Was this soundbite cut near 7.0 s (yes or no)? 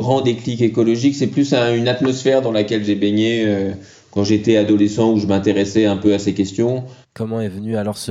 yes